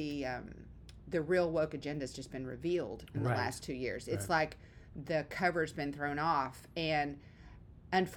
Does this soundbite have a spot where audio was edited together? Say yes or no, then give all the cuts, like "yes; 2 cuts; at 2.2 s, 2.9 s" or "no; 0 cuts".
no; 0 cuts